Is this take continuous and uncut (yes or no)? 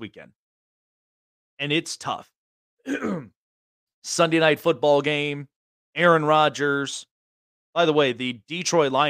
yes